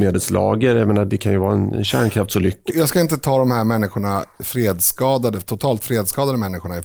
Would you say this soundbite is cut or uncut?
cut